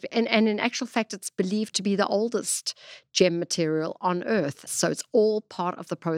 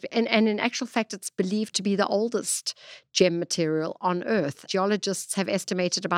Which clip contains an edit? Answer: first; 1 cut; at 4.7 s

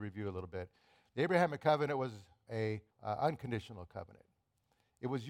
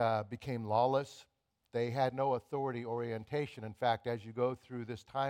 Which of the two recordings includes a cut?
first; 1 cut; at 2.9 s

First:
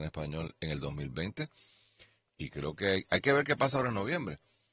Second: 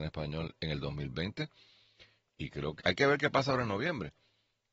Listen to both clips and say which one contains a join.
second; 1 cut; at 2.8 s

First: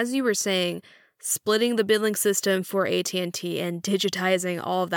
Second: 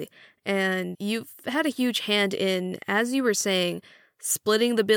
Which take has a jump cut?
second; 1 cut; at 0.9 s

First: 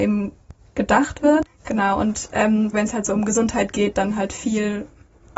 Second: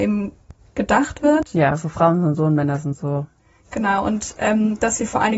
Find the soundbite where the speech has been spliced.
first; 2 cuts; at 1.5 s, 2.7 s

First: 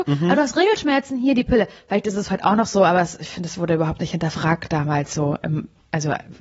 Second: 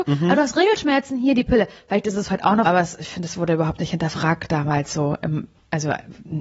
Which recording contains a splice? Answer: second; 1 cut; at 2.7 s

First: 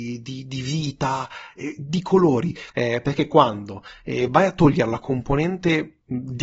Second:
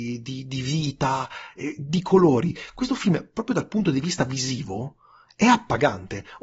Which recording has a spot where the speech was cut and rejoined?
first; 1 cut; at 2.7 s

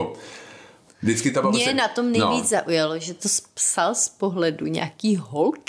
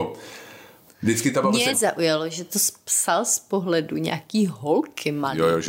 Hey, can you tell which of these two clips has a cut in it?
second; 1 cut; at 1.7 s

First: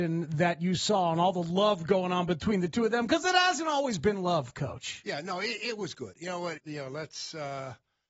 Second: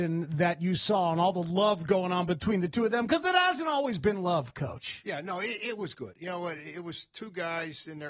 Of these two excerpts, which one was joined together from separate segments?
first; 1 cut; at 6.6 s

